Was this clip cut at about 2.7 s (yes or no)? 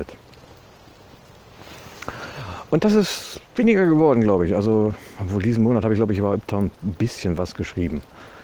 no